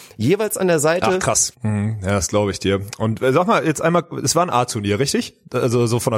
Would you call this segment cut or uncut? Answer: cut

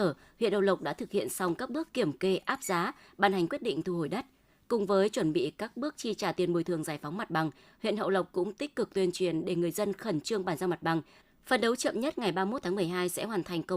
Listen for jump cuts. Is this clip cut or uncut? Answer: uncut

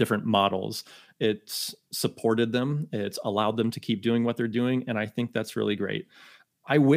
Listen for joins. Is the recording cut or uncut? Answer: uncut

